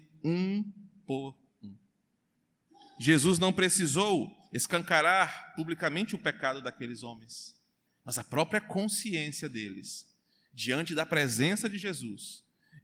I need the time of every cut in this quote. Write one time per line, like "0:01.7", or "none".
0:07.9